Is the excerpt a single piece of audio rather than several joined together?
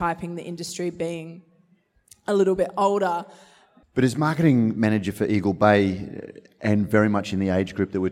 no; 1 cut; at 3.8 s

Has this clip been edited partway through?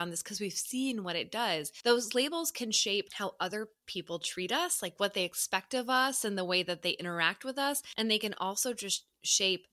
no; 0 cuts

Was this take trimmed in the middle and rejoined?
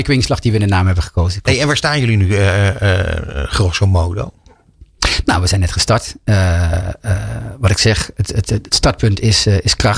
no; 0 cuts

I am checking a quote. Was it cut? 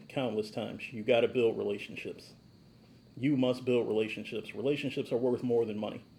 no; 0 cuts

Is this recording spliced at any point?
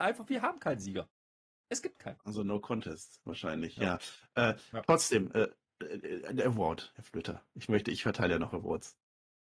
no; 0 cuts

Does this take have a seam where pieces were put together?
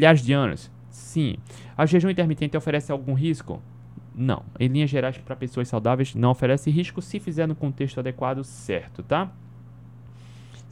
no; 0 cuts

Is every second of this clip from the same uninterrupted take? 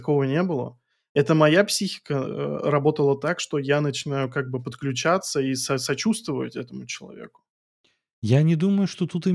yes; 0 cuts

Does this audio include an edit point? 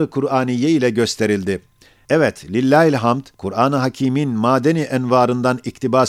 yes; 2 cuts; at 2.0 s, 3.3 s

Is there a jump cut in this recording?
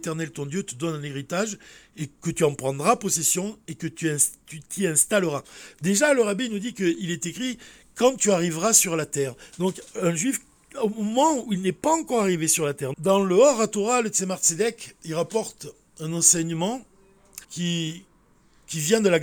yes; 2 cuts; at 12.9 s, 17.4 s

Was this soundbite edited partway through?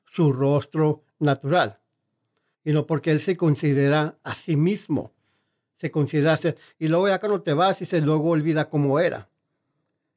yes; 1 cut; at 6.4 s

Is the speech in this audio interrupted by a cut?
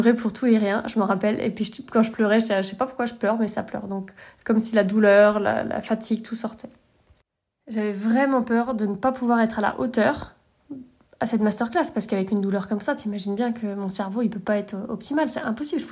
no; 0 cuts

